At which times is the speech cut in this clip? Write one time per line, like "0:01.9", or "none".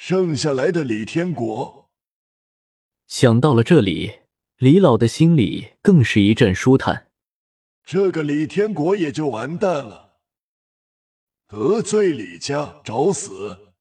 0:07.8

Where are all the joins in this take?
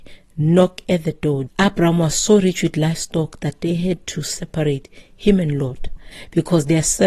0:01.5

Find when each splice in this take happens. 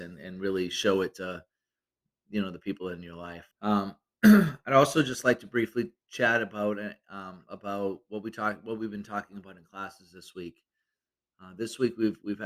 0:03.5

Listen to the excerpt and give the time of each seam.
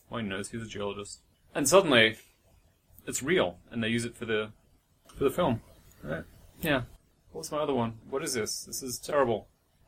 0:05.0
0:08.0

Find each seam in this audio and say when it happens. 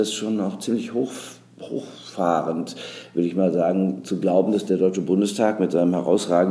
none

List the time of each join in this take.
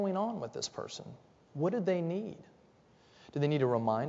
none

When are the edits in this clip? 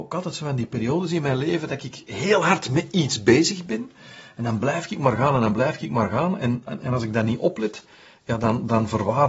none

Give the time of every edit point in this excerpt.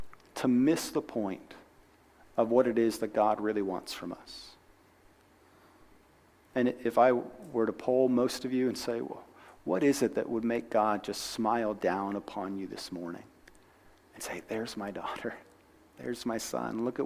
none

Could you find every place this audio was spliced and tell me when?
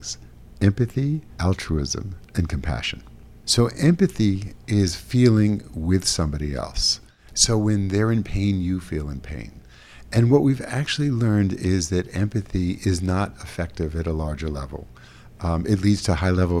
none

